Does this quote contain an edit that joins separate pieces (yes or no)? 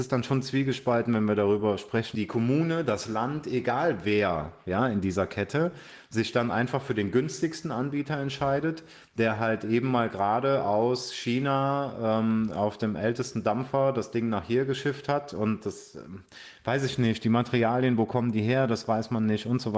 yes